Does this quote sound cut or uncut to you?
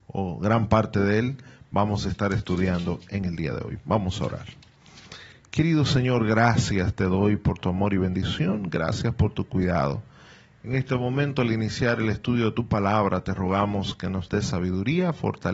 uncut